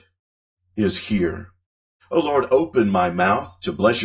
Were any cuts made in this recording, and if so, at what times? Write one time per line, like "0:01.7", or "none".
0:02.0